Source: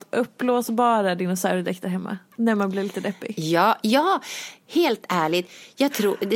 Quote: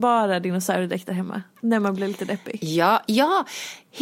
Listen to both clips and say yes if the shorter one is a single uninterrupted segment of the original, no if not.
yes